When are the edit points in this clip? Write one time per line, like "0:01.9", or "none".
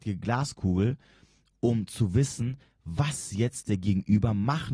none